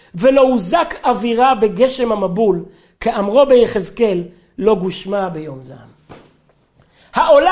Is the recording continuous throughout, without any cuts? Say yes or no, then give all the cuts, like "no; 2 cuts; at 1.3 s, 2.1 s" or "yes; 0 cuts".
yes; 0 cuts